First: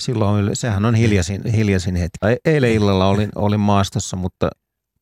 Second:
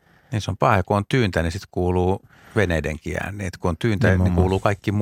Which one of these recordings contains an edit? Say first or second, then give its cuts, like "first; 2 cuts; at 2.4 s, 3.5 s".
first; 1 cut; at 2.2 s